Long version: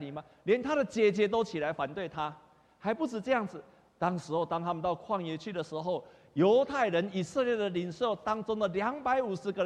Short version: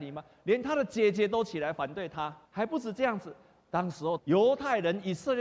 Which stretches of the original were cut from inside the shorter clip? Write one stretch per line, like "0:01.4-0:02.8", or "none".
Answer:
0:02.4-0:02.7
0:04.5-0:06.3